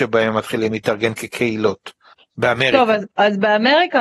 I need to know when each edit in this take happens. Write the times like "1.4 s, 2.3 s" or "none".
3.1 s